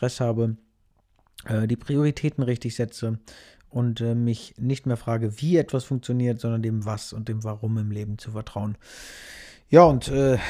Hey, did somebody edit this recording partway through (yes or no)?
no